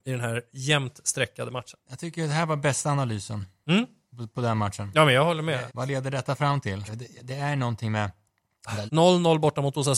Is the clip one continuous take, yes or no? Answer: no